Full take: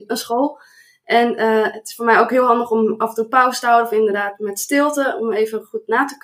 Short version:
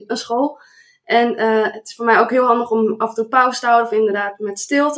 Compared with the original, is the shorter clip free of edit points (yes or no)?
yes